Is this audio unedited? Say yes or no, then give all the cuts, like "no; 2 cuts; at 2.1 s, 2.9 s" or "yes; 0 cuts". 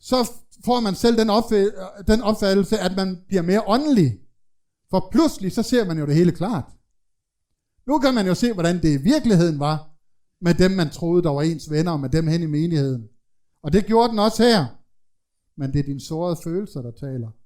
no; 2 cuts; at 13.5 s, 15.5 s